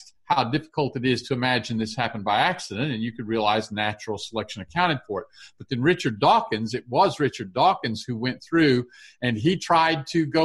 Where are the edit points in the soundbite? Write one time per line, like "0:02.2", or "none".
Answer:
none